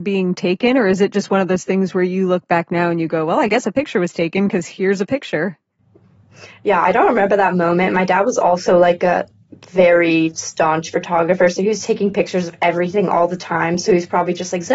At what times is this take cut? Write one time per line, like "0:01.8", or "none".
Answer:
none